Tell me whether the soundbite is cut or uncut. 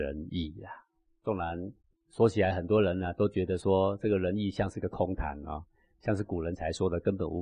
uncut